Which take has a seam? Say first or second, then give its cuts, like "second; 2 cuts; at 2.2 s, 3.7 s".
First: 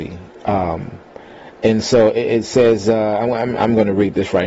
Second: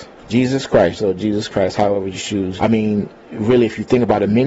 second; 2 cuts; at 0.9 s, 2.6 s